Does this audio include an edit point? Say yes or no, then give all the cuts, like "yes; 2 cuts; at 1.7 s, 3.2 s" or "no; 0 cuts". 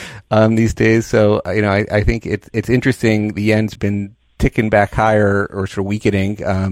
yes; 1 cut; at 3.8 s